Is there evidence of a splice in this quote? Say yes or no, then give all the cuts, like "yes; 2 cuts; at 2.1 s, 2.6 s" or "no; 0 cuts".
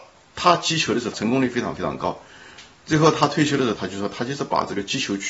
yes; 2 cuts; at 1.1 s, 3.7 s